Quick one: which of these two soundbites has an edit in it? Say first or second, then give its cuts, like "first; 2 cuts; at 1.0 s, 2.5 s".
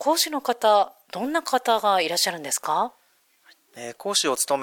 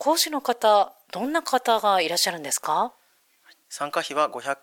second; 1 cut; at 3.6 s